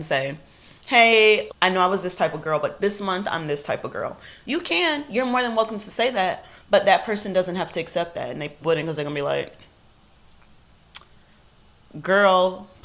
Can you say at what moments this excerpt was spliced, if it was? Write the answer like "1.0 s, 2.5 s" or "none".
1.5 s, 8.6 s